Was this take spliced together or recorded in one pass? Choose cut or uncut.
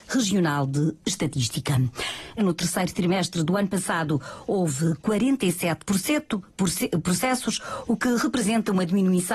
cut